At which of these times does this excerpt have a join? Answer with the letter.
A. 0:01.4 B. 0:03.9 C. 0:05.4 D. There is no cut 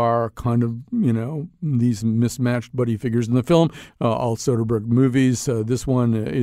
B